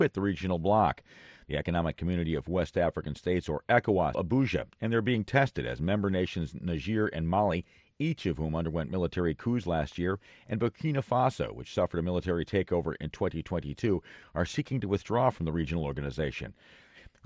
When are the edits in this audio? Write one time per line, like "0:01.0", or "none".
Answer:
0:04.1